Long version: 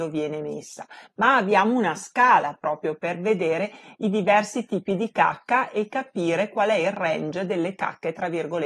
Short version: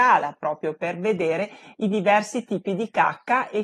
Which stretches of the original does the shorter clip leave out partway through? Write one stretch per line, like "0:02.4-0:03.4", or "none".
none